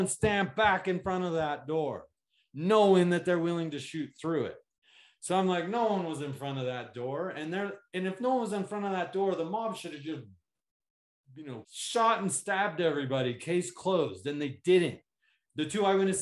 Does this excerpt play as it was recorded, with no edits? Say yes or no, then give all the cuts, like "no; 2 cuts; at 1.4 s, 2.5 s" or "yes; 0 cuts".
no; 1 cut; at 11.6 s